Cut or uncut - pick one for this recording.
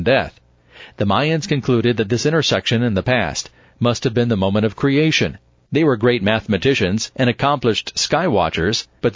cut